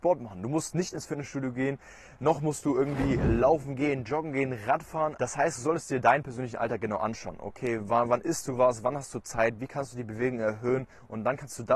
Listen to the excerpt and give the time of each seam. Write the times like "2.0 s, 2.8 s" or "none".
5.1 s